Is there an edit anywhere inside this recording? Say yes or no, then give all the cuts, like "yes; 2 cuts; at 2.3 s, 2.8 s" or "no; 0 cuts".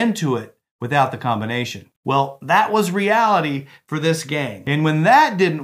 yes; 1 cut; at 1.9 s